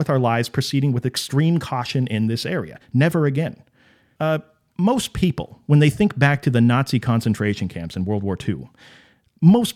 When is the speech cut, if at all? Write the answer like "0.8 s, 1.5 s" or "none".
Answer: 4.2 s